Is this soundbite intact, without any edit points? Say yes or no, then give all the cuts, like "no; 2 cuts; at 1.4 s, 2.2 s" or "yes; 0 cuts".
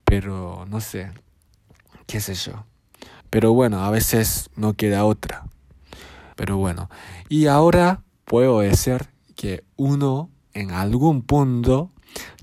no; 2 cuts; at 3.2 s, 6.3 s